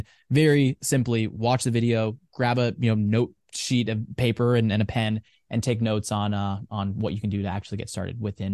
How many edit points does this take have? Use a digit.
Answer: 0